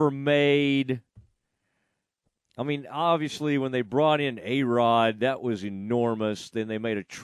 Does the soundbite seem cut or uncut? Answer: uncut